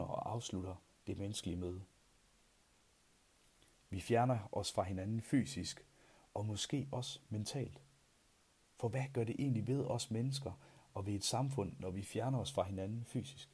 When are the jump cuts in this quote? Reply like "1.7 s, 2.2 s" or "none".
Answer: none